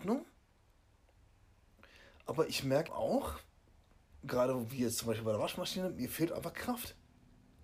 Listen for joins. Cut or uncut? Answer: cut